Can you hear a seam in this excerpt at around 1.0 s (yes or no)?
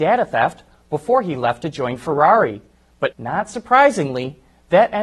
no